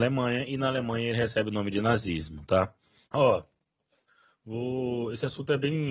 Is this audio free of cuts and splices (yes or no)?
no